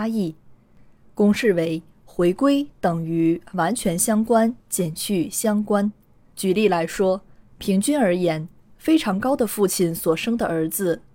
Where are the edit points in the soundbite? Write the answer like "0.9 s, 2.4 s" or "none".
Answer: 6.3 s

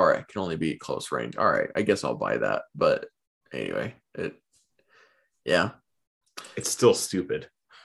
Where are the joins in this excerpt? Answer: none

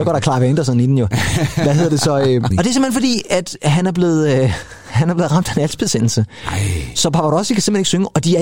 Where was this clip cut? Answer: 2.5 s

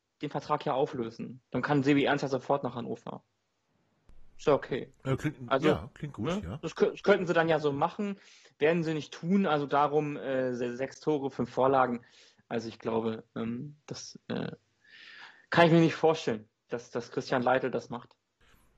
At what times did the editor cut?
none

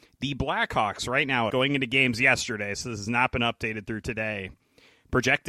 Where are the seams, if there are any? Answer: 1.5 s

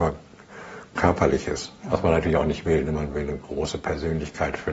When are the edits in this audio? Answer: 1.8 s

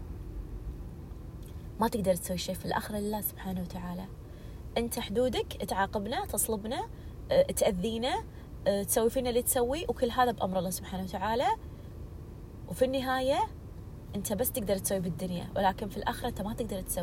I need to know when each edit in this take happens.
2.6 s

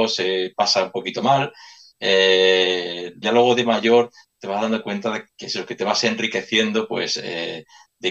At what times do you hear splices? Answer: 3.2 s

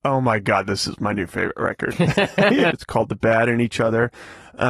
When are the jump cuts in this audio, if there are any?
2.7 s

